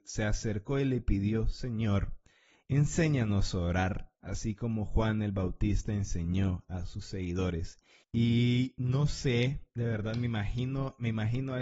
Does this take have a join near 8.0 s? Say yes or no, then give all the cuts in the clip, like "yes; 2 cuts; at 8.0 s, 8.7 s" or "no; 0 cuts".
yes; 1 cut; at 8.0 s